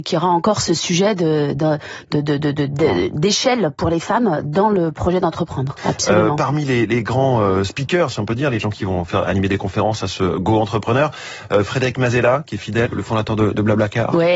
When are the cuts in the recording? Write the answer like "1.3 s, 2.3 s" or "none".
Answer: 5.8 s, 12.9 s